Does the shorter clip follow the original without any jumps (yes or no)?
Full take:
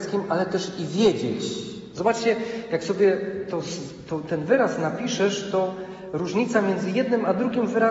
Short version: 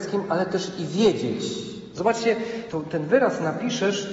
no